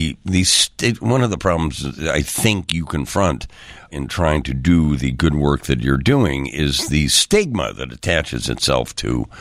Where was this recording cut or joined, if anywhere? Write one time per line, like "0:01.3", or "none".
0:03.9